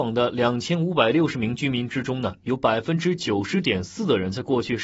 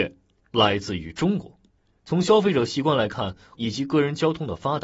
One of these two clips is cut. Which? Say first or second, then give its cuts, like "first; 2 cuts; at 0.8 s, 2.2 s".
second; 2 cuts; at 2.0 s, 3.5 s